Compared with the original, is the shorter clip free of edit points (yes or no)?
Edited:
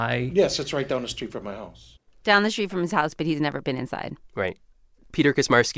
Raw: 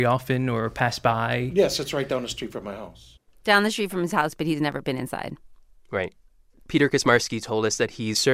no